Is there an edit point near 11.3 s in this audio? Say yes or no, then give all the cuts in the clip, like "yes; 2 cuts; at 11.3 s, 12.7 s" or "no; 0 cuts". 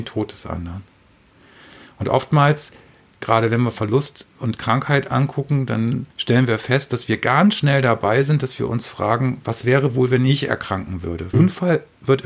yes; 2 cuts; at 6.1 s, 11.3 s